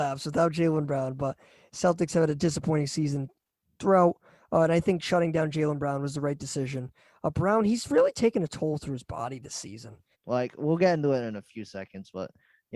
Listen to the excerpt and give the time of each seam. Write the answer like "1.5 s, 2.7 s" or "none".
10.1 s